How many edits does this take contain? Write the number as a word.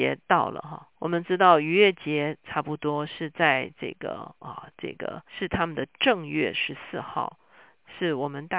two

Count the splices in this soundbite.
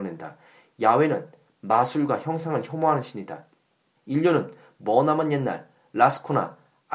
one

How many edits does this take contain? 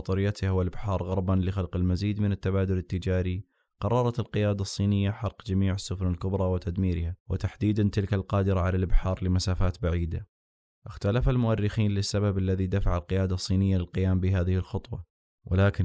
zero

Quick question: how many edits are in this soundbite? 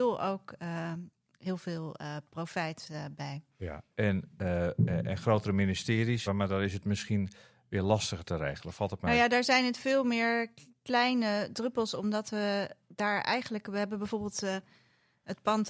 one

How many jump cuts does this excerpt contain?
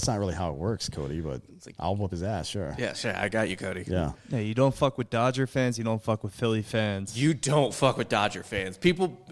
zero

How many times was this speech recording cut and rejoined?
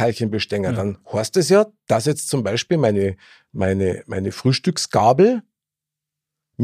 zero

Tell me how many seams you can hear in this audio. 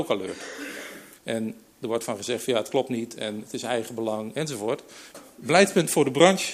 two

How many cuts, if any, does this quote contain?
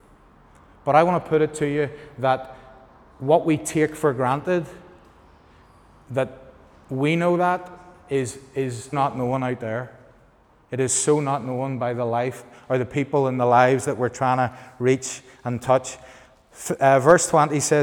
one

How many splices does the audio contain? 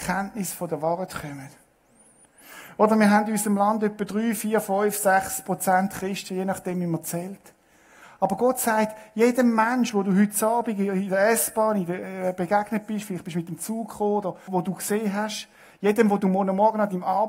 one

